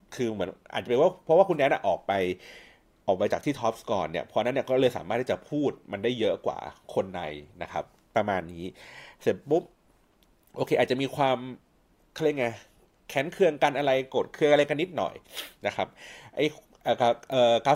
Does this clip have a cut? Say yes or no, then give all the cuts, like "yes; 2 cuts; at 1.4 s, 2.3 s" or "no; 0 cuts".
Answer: no; 0 cuts